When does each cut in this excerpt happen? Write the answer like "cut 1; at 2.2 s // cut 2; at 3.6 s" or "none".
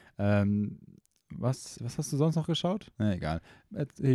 cut 1; at 1.8 s // cut 2; at 2.9 s